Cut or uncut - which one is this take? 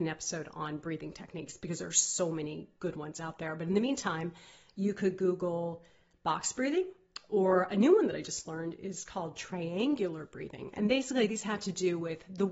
uncut